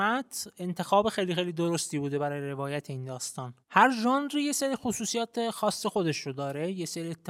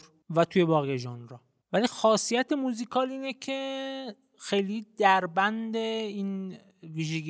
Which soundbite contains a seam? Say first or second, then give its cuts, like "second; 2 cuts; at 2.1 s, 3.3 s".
first; 1 cut; at 3.6 s